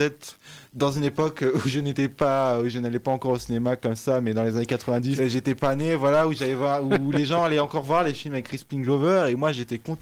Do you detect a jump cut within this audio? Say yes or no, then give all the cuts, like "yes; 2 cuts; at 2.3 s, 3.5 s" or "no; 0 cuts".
yes; 1 cut; at 5.2 s